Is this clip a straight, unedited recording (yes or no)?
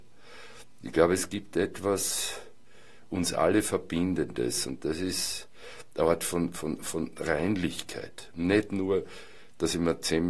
yes